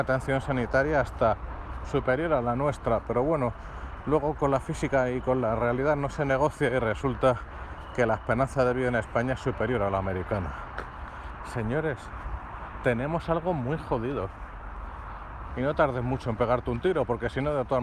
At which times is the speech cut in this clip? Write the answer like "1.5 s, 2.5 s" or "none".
11.4 s, 15.5 s